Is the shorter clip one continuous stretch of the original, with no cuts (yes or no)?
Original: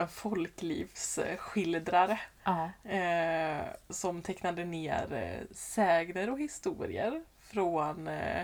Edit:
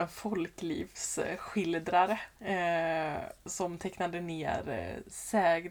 no